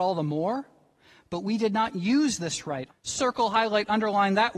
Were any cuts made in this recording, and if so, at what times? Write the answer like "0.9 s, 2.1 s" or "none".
2.9 s